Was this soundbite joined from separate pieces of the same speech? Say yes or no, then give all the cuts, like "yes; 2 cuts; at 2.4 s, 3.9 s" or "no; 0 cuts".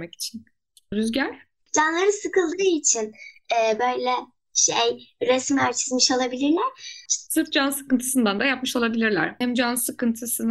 yes; 2 cuts; at 7.1 s, 9.4 s